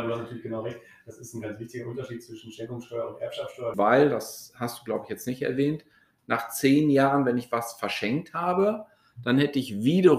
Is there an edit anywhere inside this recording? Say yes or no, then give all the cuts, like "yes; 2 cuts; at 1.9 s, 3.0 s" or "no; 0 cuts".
yes; 1 cut; at 3.7 s